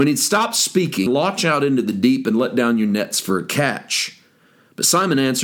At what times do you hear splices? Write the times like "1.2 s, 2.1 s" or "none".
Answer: 1.1 s

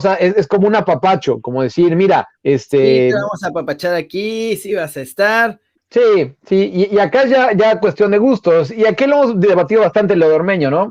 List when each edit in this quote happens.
2.4 s, 5.7 s

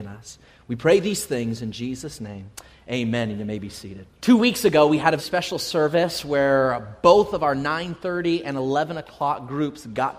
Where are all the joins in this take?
4.1 s, 5.2 s

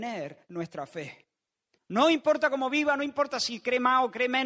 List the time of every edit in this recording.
1.8 s

